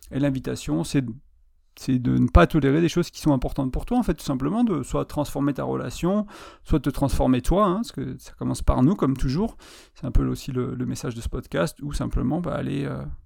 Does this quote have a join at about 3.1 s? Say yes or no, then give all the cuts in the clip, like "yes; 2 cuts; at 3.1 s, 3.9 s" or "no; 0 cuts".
yes; 1 cut; at 3.1 s